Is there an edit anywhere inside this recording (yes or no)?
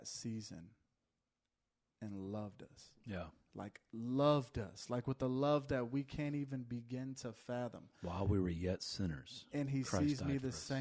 no